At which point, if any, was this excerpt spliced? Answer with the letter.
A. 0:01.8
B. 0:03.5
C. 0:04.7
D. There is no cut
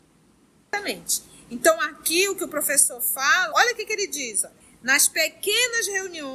B